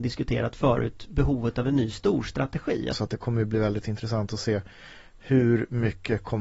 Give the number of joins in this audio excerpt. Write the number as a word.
one